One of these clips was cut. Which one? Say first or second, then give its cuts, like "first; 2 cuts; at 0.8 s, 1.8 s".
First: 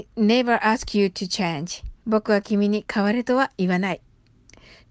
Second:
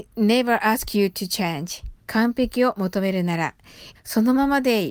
second; 2 cuts; at 2.0 s, 3.9 s